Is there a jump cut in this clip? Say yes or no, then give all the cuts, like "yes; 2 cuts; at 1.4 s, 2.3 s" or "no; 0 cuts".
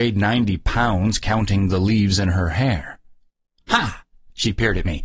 yes; 1 cut; at 3.6 s